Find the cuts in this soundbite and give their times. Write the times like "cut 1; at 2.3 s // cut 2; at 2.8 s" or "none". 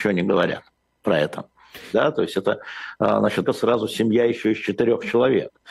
cut 1; at 1.9 s // cut 2; at 3.4 s